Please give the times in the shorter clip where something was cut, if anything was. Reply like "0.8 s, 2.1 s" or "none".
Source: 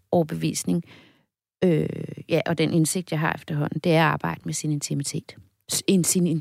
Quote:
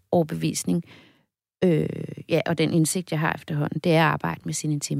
none